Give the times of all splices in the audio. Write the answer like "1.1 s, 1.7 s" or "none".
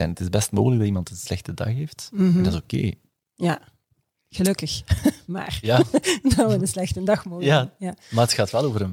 none